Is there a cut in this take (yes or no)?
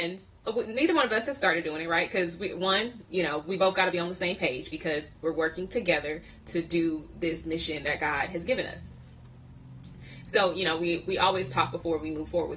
no